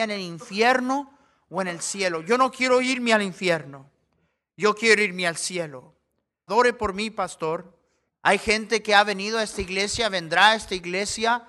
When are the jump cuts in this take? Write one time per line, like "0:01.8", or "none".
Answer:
0:06.5
0:08.1